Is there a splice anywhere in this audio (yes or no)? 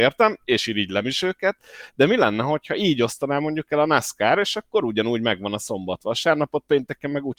no